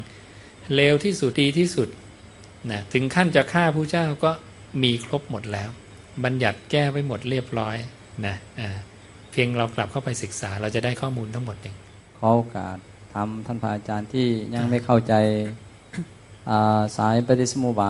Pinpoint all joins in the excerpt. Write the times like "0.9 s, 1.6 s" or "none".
1.3 s